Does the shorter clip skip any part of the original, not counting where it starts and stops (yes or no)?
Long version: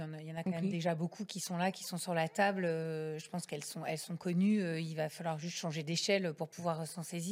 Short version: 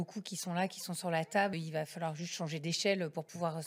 yes